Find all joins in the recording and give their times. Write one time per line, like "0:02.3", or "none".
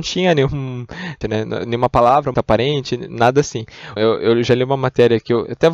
0:01.2
0:02.3
0:04.0